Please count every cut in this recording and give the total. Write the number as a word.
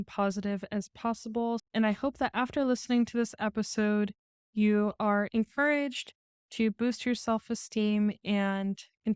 one